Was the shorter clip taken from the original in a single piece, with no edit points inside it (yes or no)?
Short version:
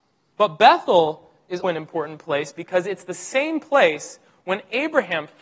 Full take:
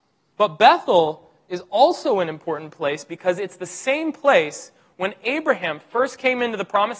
no